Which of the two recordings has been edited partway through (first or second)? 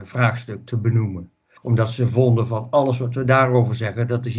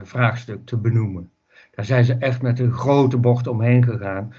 first